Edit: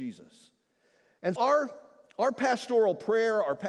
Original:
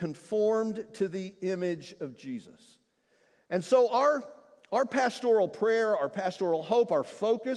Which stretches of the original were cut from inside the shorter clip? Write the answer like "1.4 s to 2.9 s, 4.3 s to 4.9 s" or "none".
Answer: 3.6 s to 3.9 s